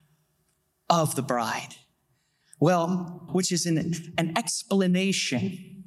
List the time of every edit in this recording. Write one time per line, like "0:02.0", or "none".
0:03.3